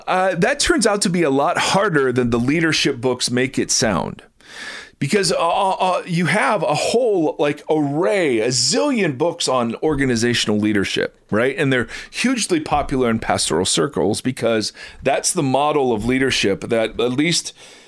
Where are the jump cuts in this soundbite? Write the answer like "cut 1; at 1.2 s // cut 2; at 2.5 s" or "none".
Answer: none